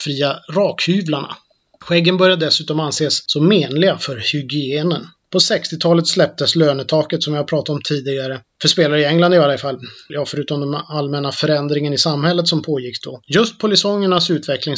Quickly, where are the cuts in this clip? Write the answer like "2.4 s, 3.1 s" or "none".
10.1 s, 13.2 s